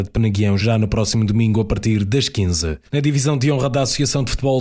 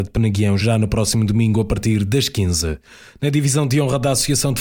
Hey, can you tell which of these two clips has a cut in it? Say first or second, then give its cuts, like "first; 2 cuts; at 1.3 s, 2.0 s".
first; 1 cut; at 2.9 s